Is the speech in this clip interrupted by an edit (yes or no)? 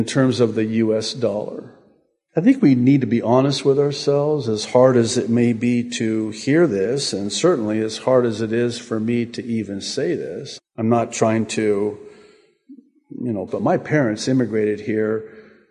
yes